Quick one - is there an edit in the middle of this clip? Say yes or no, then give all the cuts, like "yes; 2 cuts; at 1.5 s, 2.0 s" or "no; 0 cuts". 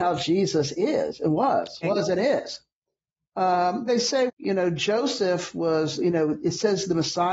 yes; 2 cuts; at 1.8 s, 4.3 s